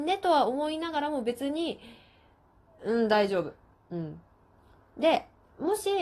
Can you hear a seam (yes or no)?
yes